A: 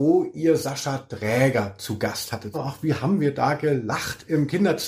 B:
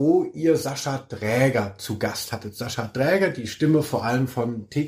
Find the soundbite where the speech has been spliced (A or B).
A